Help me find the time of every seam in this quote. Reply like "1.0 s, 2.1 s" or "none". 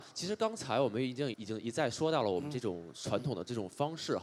1.3 s